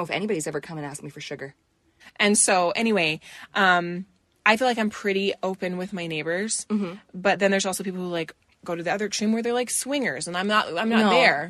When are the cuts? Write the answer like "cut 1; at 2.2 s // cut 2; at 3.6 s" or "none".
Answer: cut 1; at 2.0 s